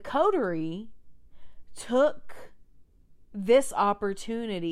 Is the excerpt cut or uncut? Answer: uncut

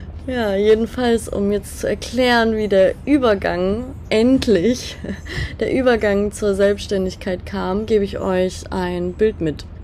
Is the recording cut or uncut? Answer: cut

